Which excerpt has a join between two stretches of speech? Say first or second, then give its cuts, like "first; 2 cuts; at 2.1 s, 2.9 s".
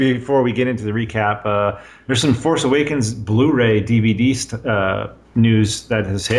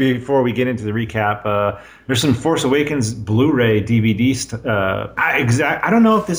second; 1 cut; at 5.2 s